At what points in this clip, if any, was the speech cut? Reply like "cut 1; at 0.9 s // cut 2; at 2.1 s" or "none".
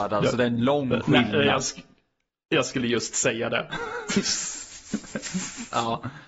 none